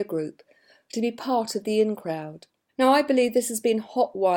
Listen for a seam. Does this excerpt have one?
yes; 1 cut; at 2.7 s

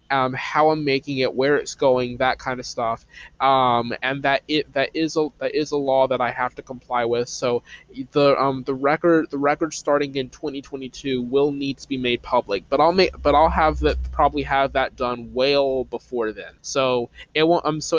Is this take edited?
yes; 2 cuts; at 4.0 s, 16.6 s

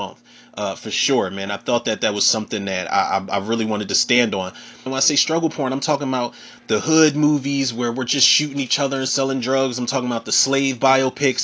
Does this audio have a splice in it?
yes; 1 cut; at 4.9 s

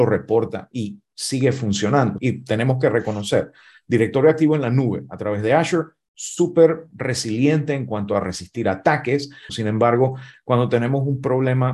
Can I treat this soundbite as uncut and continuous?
no; 2 cuts; at 2.2 s, 9.5 s

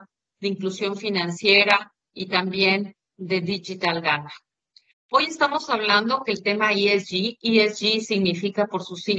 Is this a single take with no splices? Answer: yes; 0 cuts

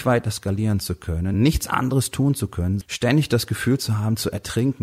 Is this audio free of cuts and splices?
no; 2 cuts; at 1.3 s, 2.8 s

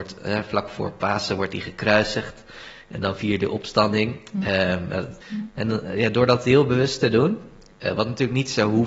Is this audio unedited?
no; 1 cut; at 5.2 s

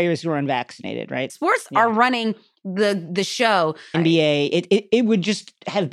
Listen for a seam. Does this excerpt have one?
yes; 2 cuts; at 1.3 s, 3.9 s

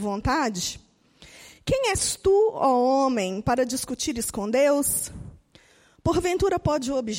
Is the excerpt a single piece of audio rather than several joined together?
yes; 0 cuts

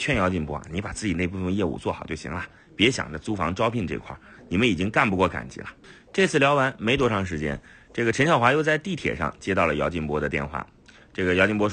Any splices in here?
no; 0 cuts

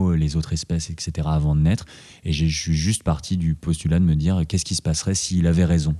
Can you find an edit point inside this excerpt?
no; 0 cuts

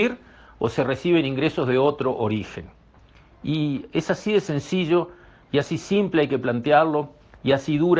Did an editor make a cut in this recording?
no; 0 cuts

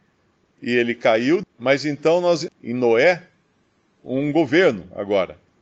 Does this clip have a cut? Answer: yes; 2 cuts; at 1.4 s, 2.5 s

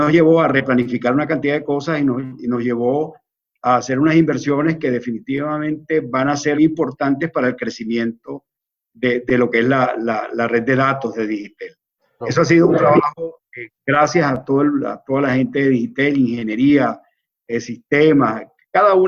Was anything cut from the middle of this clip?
yes; 2 cuts; at 6.6 s, 12.2 s

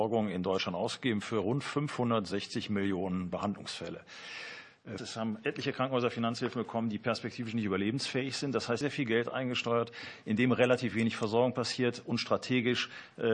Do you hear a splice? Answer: yes; 2 cuts; at 5.0 s, 8.8 s

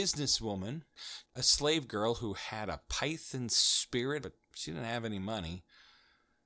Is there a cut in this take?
yes; 1 cut; at 4.2 s

